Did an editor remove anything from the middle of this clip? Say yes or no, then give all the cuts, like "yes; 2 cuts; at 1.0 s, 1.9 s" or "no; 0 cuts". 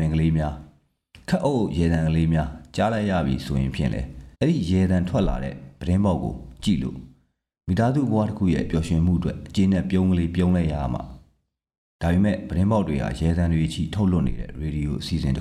yes; 1 cut; at 4.3 s